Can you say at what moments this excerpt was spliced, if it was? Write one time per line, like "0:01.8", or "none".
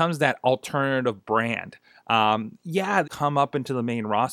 0:03.0